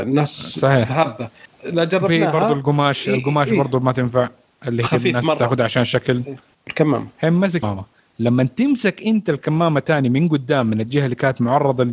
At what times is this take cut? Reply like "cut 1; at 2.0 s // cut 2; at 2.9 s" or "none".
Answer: cut 1; at 6.5 s

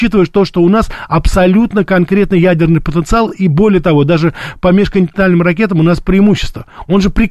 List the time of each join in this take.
none

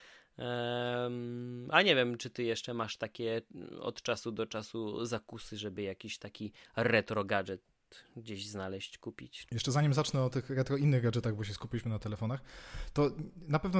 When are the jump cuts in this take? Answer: cut 1; at 9.5 s

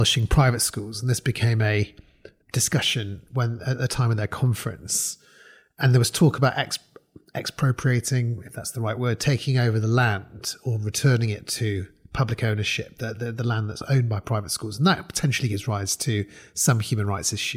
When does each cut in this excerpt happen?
cut 1; at 2.4 s

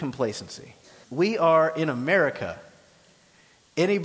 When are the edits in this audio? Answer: cut 1; at 1.0 s

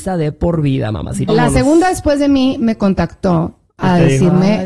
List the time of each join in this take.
cut 1; at 1.3 s

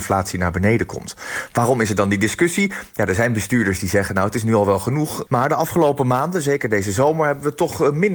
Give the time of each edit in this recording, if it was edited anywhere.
cut 1; at 5.3 s

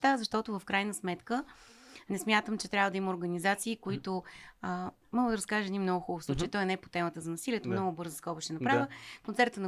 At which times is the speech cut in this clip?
cut 1; at 5.0 s

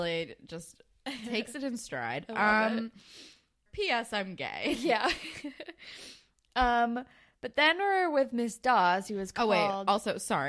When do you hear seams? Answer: cut 1; at 3.7 s

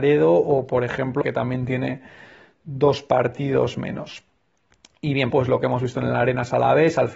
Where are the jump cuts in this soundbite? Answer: cut 1; at 1.2 s // cut 2; at 5.3 s

